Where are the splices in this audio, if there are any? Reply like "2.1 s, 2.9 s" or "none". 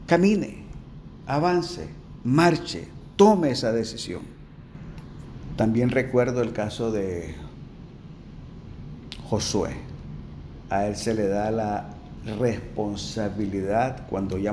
10.6 s

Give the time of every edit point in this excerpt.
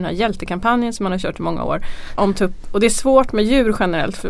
2.2 s

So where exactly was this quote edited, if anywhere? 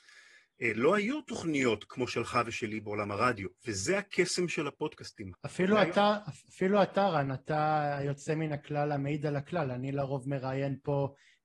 3.6 s, 5.3 s

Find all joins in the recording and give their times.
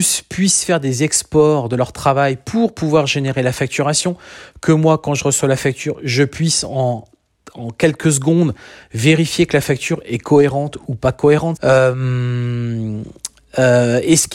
11.6 s

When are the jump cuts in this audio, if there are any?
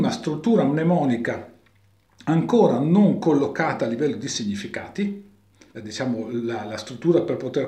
5.7 s

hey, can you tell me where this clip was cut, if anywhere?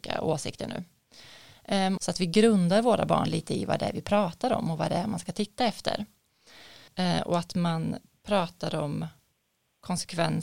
2.0 s, 6.9 s

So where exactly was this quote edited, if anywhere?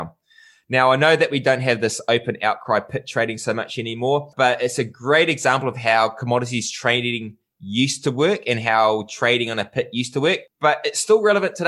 none

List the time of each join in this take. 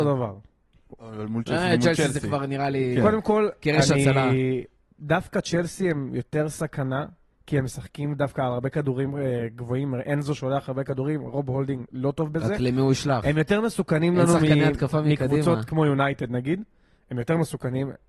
11.9 s

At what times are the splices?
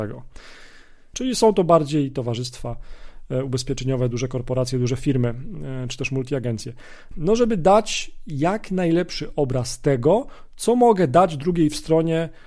1.1 s, 7.1 s

